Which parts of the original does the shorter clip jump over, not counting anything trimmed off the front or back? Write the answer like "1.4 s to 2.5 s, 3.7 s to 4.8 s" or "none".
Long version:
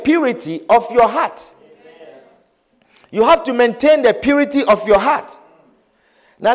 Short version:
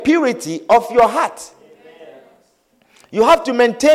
none